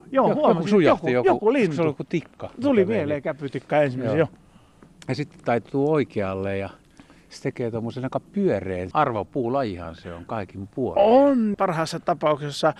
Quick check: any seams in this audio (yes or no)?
yes